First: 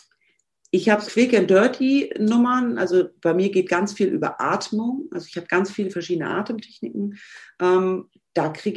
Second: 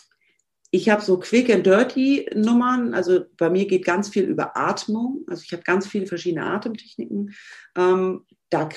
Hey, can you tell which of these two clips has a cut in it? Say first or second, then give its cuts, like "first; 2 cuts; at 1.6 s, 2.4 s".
first; 1 cut; at 1.1 s